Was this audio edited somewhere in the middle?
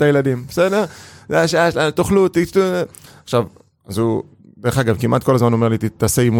no; 0 cuts

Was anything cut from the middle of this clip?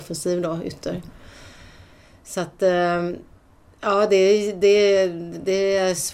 no; 0 cuts

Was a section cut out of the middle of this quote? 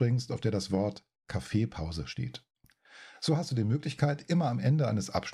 no; 0 cuts

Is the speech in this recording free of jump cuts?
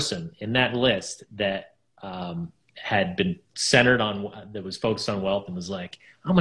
no; 1 cut; at 3.5 s

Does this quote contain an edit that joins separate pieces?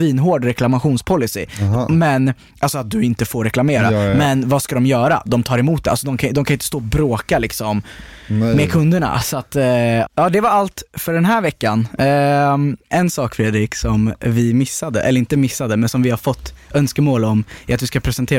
no; 0 cuts

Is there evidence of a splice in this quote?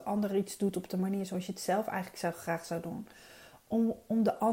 no; 0 cuts

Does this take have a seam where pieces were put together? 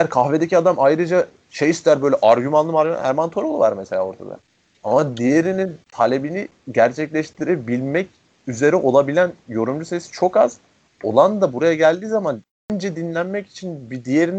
no; 0 cuts

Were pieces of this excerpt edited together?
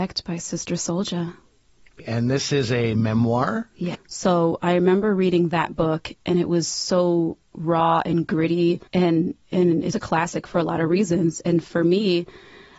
yes; 3 cuts; at 3.9 s, 8.9 s, 9.9 s

